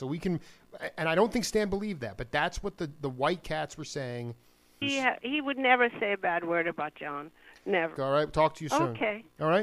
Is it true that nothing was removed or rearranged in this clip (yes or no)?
no